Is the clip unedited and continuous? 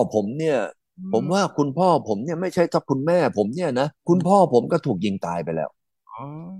no; 1 cut; at 4.0 s

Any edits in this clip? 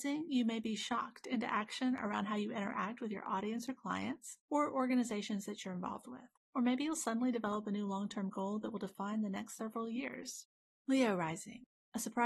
no; 0 cuts

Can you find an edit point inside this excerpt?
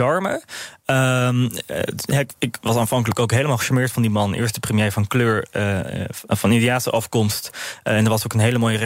no; 0 cuts

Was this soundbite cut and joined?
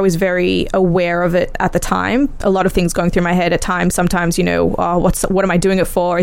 yes; 1 cut; at 2.4 s

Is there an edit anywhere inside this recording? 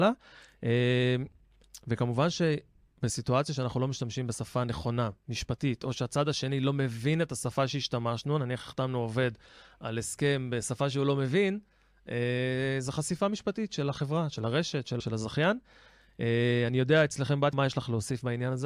yes; 2 cuts; at 15.0 s, 17.5 s

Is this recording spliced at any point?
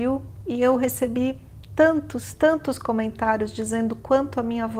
no; 0 cuts

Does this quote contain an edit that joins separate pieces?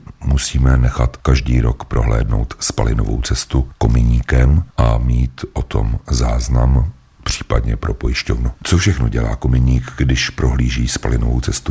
no; 0 cuts

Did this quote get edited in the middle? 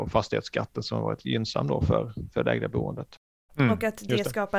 yes; 1 cut; at 3.5 s

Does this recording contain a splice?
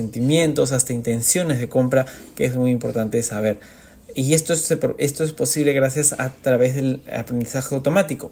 no; 0 cuts

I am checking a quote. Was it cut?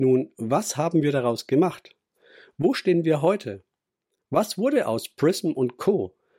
no; 0 cuts

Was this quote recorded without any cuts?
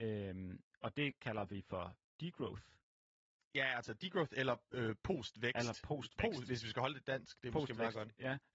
yes; 0 cuts

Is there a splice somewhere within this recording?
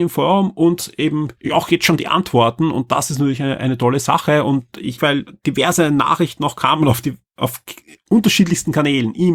yes; 2 cuts; at 1.4 s, 5.0 s

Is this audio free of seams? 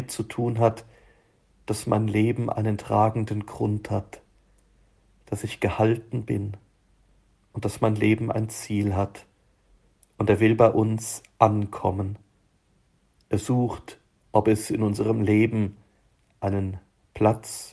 no; 1 cut; at 10.0 s

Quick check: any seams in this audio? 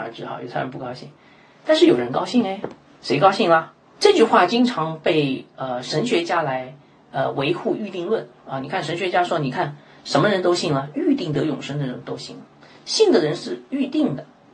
yes; 1 cut; at 4.0 s

